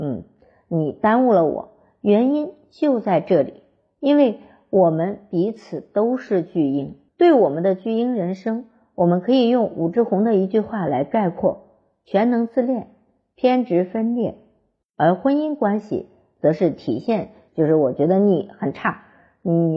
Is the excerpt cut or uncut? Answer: cut